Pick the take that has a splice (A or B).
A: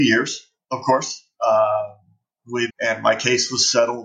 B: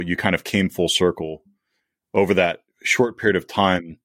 A